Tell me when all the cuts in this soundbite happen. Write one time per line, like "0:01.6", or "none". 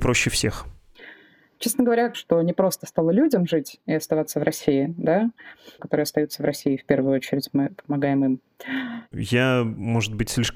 0:02.1
0:05.8
0:09.1